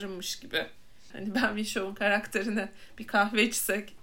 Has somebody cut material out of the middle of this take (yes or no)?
yes